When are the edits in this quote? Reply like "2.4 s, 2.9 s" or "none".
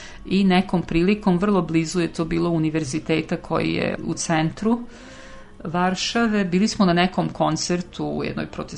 none